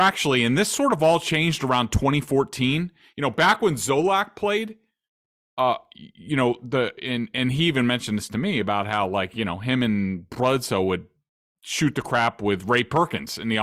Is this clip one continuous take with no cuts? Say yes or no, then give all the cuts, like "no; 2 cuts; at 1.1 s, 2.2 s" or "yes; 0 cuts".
yes; 0 cuts